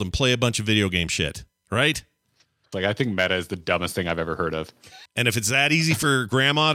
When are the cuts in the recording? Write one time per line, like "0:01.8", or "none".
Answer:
0:02.7
0:05.1